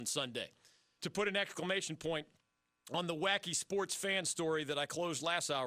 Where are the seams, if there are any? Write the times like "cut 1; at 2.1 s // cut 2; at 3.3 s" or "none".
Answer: cut 1; at 1.0 s